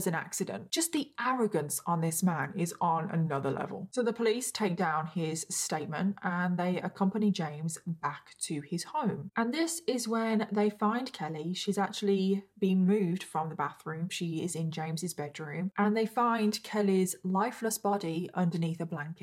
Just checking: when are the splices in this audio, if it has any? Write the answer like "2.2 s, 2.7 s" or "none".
none